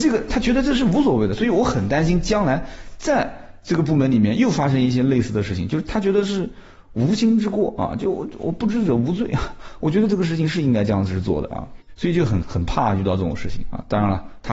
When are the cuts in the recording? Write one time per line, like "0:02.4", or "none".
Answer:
0:12.4

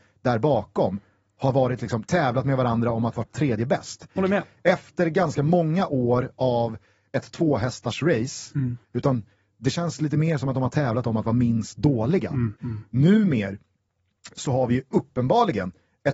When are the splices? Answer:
0:04.2
0:08.8
0:12.6

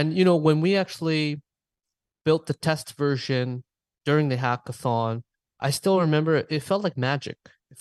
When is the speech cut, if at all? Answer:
none

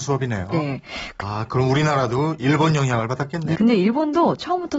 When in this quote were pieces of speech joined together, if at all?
0:01.2
0:03.5

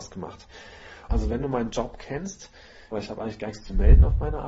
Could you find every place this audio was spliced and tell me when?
0:01.1
0:02.9

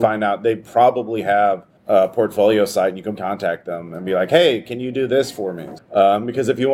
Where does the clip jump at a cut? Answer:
0:01.8
0:03.1
0:05.8

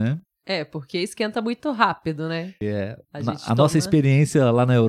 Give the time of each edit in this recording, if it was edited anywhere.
0:02.6

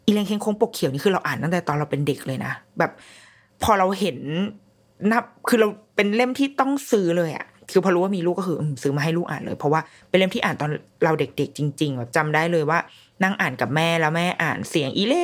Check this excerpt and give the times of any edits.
none

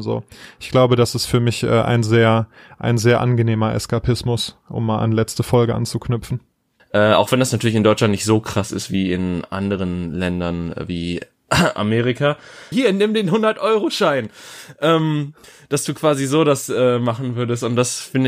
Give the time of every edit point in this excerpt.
0:06.8
0:12.7

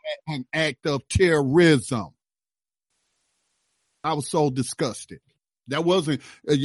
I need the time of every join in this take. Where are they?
none

